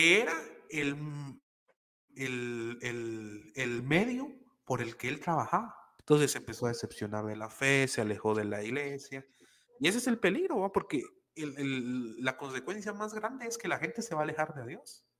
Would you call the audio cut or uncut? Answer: cut